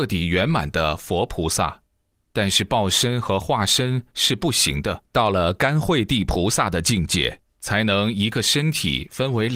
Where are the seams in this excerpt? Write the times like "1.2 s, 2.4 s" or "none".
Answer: 2.1 s, 5.1 s